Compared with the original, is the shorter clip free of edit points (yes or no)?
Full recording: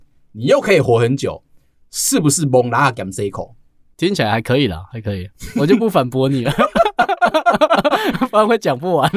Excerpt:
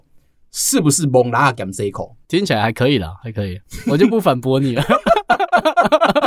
no